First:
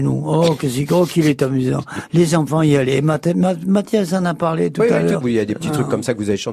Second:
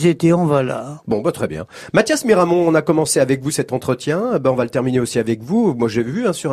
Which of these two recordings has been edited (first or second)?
first